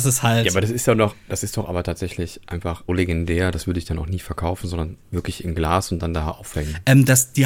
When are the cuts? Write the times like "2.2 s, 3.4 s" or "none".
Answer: 2.9 s